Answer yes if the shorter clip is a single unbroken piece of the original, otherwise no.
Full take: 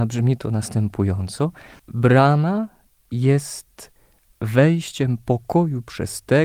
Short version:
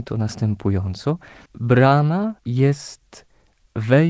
no